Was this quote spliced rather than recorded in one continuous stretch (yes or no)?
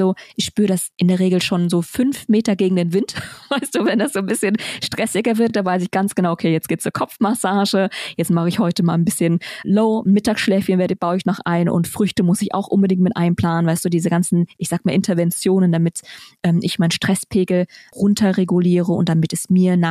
no